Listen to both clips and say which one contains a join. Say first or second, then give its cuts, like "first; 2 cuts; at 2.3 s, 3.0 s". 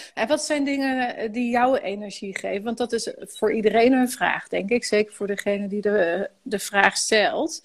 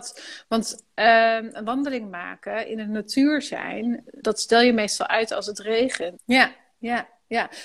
second; 2 cuts; at 4.2 s, 6.2 s